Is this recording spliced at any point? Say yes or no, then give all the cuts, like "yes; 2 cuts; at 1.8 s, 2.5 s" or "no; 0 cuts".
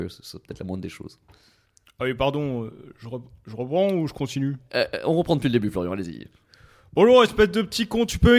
no; 0 cuts